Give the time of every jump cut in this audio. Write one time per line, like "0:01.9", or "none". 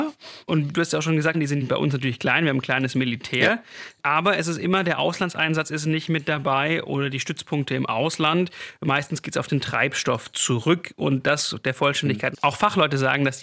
0:01.3
0:12.3